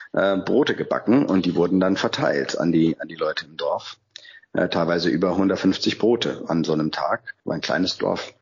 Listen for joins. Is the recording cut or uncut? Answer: cut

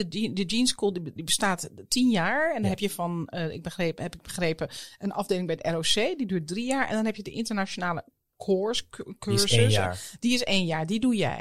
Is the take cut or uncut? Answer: cut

